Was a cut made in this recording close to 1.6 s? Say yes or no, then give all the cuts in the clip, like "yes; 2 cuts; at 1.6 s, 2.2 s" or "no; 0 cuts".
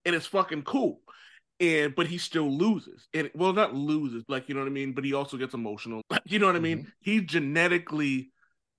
no; 2 cuts; at 4.2 s, 6.0 s